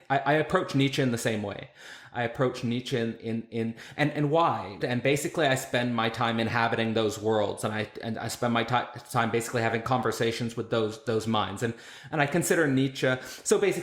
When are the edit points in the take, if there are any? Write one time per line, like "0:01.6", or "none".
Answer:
0:04.8